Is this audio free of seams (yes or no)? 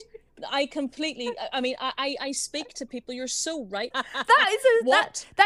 no